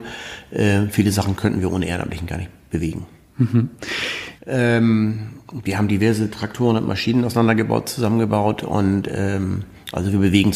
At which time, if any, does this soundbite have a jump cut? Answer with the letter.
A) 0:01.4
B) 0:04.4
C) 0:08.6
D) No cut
B